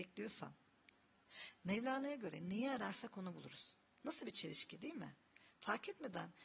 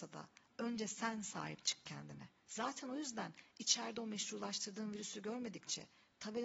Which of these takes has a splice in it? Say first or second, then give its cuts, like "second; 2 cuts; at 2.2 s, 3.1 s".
second; 1 cut; at 2.5 s